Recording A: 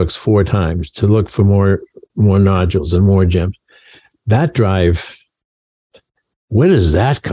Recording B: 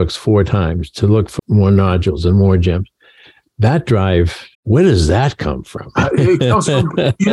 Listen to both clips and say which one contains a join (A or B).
B